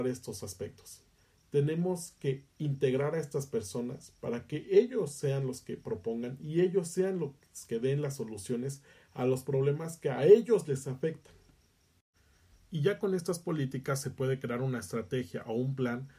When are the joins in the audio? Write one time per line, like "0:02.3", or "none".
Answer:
none